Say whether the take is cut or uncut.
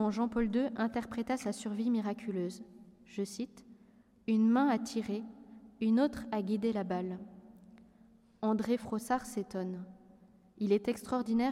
uncut